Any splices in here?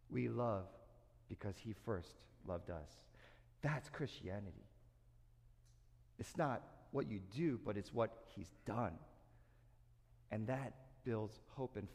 no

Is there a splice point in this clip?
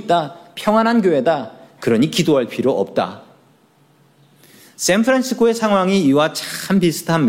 no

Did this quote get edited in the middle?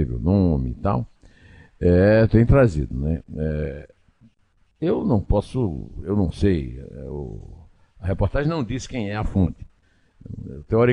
no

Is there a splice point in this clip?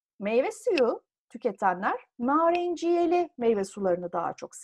no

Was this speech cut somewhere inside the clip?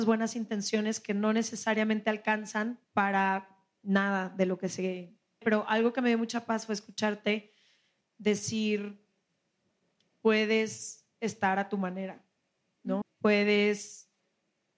yes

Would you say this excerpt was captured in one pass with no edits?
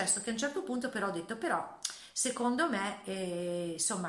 yes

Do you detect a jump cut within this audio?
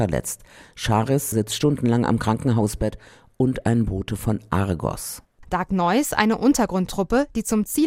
yes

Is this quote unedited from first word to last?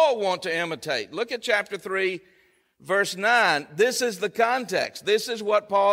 yes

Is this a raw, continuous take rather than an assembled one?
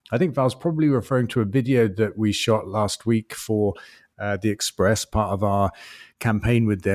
yes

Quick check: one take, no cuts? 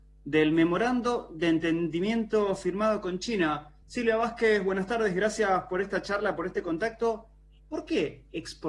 yes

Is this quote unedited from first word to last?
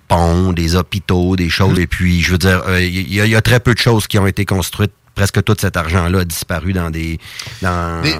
no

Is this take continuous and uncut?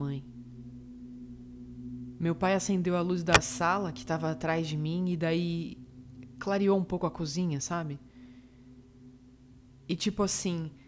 yes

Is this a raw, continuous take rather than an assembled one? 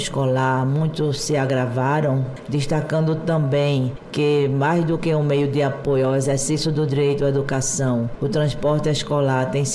yes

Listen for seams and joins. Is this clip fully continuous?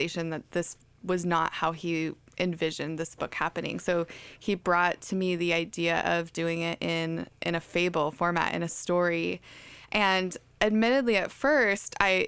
yes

